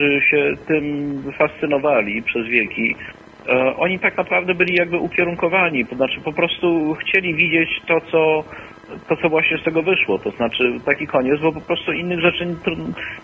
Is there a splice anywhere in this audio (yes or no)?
no